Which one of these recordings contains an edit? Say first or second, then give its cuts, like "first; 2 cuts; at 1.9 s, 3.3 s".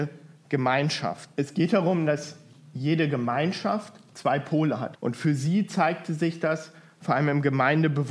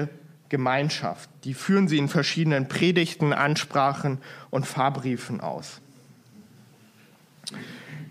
first; 3 cuts; at 1.3 s, 4.9 s, 7.0 s